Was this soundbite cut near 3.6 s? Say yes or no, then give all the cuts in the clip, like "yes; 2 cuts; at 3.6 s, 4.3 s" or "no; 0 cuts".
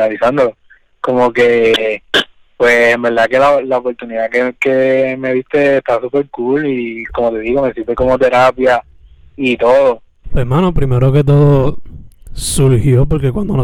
no; 1 cut; at 10.2 s